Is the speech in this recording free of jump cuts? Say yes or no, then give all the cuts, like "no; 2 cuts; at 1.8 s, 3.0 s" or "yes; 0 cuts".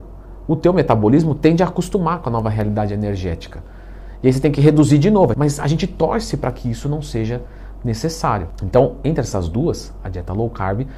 no; 1 cut; at 5.3 s